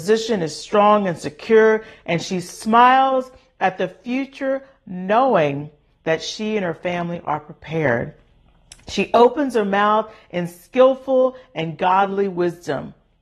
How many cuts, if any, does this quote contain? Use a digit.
0